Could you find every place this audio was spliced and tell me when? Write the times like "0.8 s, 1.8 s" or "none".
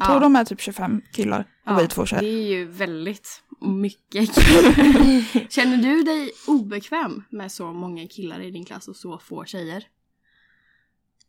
none

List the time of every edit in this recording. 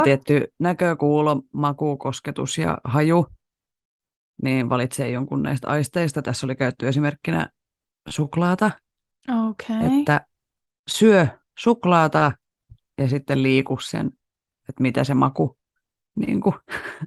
none

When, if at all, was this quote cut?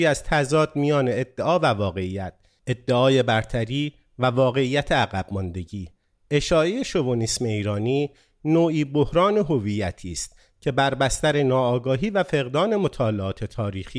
none

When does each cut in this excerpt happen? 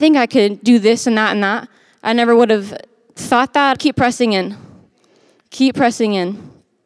3.7 s

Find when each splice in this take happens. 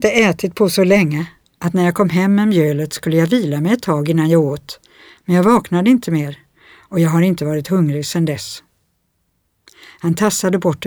none

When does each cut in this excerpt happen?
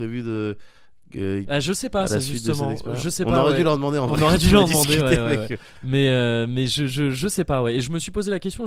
1.5 s

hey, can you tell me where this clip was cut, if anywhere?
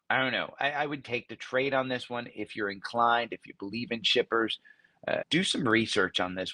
1.0 s, 5.2 s

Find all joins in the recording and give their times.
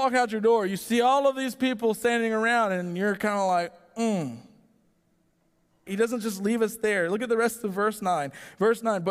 5.9 s

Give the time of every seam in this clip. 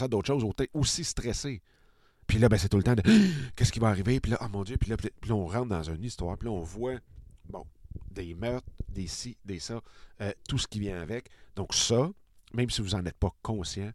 2.2 s

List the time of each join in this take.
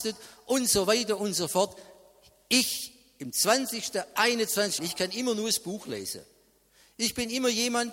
4.8 s

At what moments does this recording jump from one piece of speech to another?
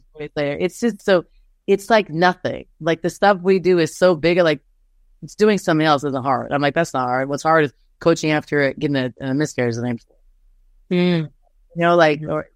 1.0 s

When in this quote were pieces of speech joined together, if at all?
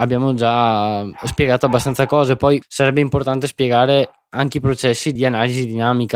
2.6 s, 5.2 s

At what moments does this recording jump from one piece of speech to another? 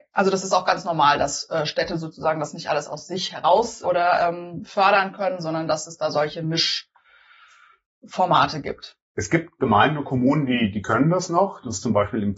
3.8 s

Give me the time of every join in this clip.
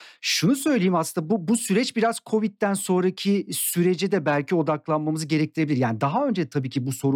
none

